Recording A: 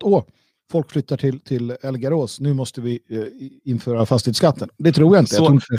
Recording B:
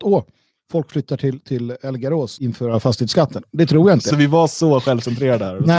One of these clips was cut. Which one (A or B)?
B